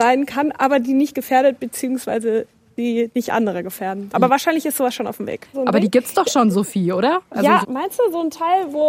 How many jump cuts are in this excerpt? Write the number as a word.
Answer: three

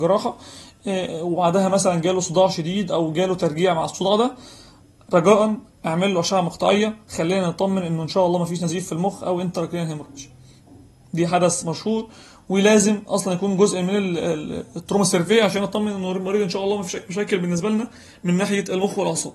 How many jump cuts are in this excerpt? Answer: zero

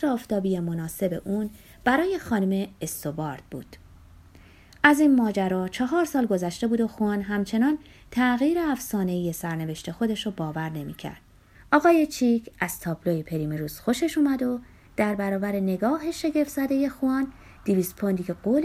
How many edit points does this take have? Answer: one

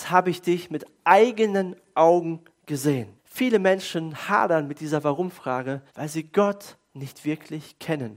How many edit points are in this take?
two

